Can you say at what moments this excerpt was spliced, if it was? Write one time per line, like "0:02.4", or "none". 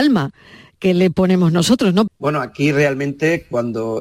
0:02.1